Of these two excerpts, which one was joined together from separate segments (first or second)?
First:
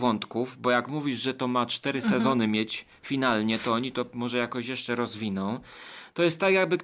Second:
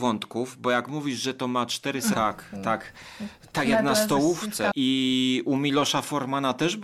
second